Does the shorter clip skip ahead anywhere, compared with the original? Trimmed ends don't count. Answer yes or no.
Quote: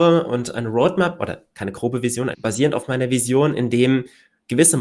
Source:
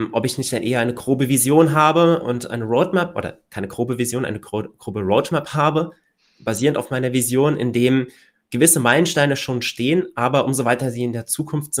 yes